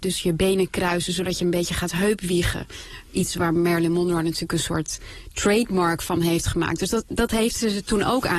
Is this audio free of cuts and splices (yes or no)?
yes